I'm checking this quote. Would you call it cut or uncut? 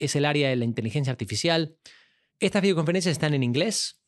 cut